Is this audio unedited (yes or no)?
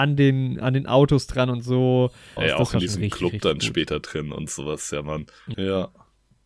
no